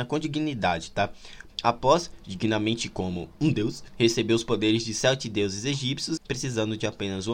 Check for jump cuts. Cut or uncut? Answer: cut